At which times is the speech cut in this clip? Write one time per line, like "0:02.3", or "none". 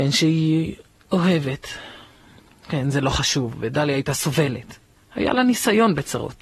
0:05.0

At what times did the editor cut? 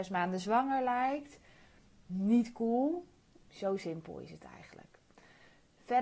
0:03.5

